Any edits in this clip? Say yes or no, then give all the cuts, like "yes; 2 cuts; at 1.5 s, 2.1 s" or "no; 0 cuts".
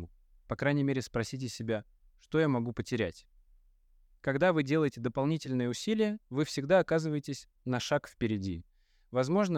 no; 0 cuts